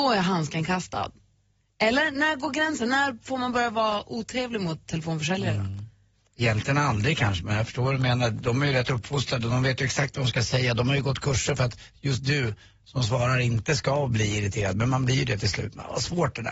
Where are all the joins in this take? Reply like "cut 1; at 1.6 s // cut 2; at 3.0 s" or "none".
none